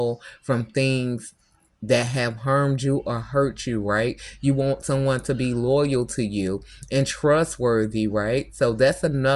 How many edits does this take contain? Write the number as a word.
zero